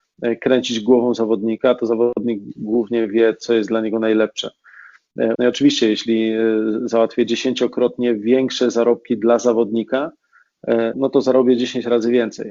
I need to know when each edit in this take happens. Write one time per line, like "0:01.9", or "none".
0:05.4
0:10.9

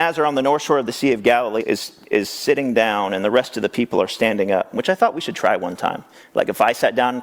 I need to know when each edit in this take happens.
0:01.6

